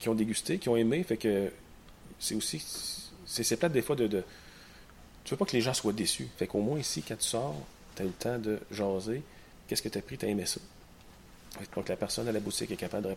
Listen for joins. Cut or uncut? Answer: cut